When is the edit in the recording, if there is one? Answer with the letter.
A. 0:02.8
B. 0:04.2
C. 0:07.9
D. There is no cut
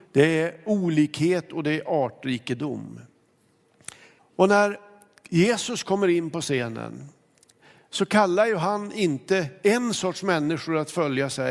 B